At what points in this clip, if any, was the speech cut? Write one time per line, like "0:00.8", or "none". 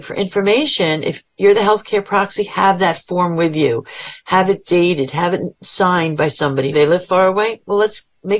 0:06.7